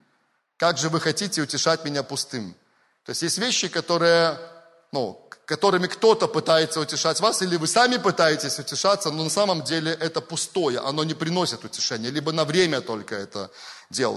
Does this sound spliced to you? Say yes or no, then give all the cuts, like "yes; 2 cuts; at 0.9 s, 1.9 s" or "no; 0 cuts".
no; 0 cuts